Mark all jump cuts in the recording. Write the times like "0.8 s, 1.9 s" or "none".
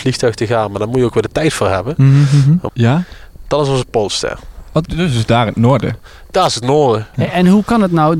2.7 s, 4.9 s

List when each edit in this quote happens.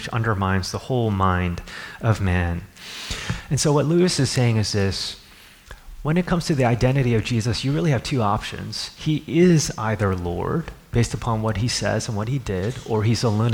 none

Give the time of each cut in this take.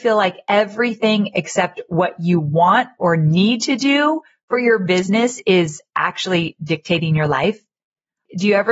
none

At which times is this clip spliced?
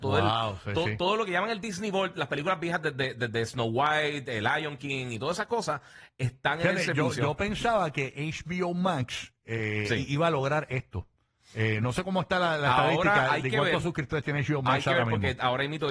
none

